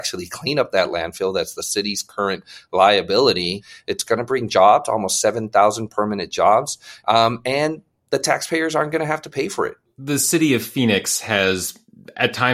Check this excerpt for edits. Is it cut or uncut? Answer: cut